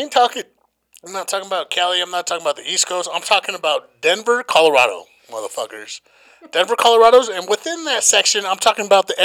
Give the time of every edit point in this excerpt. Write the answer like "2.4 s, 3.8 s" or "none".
none